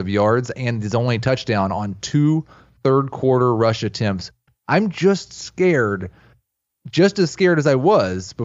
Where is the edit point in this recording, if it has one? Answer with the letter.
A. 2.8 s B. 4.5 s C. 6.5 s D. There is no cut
B